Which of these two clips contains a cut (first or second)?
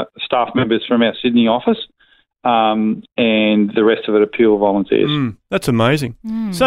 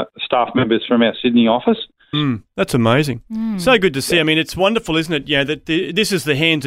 second